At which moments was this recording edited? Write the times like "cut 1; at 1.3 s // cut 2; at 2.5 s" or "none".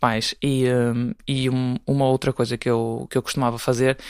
none